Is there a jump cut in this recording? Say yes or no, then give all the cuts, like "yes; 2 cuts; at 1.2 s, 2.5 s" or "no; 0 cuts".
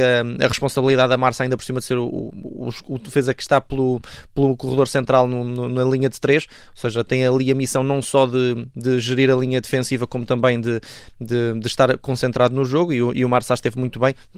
no; 0 cuts